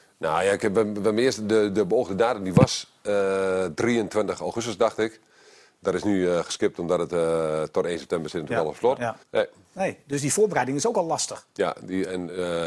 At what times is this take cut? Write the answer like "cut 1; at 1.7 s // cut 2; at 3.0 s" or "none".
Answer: cut 1; at 9.2 s